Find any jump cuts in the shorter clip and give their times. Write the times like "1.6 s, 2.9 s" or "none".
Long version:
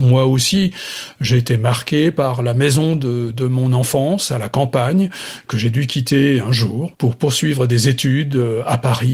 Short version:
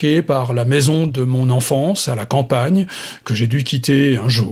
1.1 s